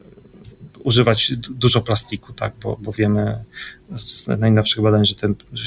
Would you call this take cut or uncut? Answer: uncut